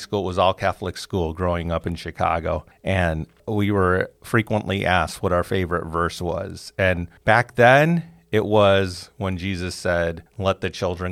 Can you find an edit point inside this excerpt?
no; 0 cuts

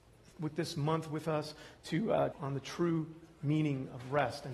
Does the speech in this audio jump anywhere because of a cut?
yes; 1 cut; at 2.3 s

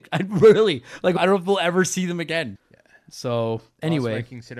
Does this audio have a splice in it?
yes; 2 cuts; at 1.2 s, 2.6 s

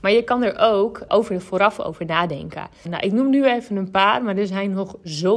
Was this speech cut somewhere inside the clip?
yes; 2 cuts; at 1.1 s, 2.9 s

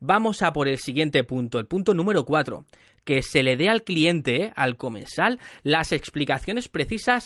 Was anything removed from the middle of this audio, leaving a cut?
no; 0 cuts

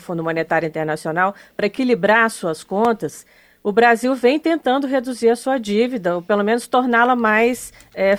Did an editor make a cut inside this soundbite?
no; 0 cuts

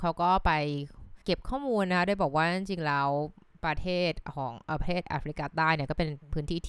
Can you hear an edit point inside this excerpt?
yes; 1 cut; at 1.2 s

